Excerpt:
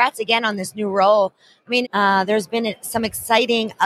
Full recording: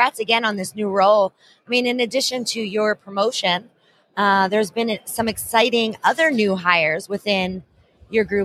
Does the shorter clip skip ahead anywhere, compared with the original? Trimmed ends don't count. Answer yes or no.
yes